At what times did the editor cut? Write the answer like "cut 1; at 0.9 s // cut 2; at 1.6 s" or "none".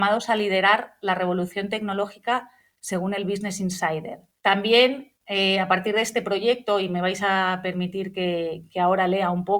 cut 1; at 4.4 s